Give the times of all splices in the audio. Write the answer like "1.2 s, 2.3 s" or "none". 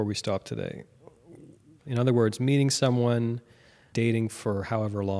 1.8 s, 3.9 s